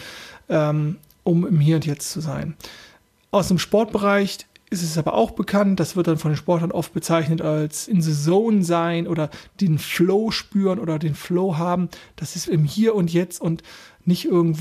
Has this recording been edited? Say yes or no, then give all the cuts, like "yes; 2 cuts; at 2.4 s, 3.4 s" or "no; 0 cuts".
yes; 2 cuts; at 7.9 s, 12.5 s